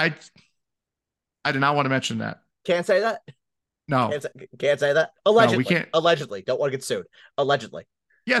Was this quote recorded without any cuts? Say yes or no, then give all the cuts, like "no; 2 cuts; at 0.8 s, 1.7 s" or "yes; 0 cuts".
no; 1 cut; at 5.2 s